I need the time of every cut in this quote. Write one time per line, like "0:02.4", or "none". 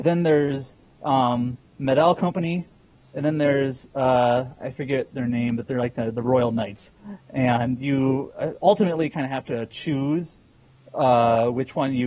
none